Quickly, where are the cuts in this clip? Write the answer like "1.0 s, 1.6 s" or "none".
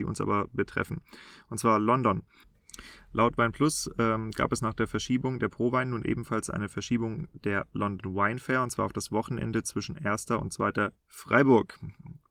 10.9 s